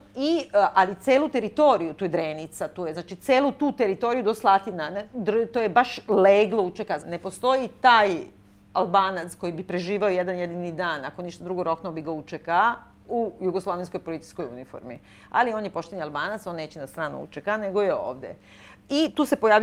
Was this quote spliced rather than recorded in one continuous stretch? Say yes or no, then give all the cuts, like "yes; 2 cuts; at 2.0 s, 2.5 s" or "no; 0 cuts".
yes; 1 cut; at 7.0 s